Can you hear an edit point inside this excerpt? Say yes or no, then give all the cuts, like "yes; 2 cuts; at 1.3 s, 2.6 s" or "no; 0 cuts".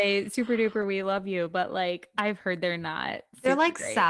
no; 0 cuts